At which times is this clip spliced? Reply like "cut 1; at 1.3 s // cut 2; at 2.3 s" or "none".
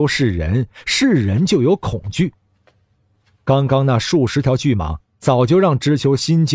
none